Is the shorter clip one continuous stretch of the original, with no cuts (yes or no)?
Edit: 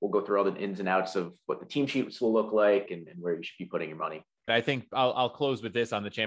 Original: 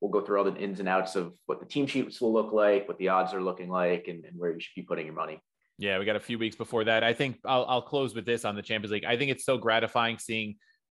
no